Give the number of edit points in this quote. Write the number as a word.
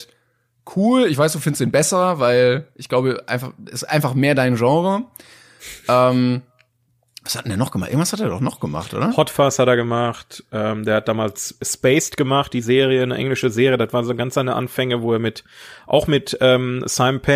zero